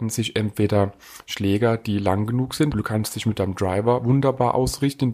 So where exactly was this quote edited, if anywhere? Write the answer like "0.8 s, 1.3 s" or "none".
2.7 s